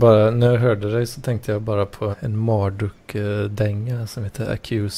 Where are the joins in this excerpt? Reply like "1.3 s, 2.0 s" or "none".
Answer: 2.1 s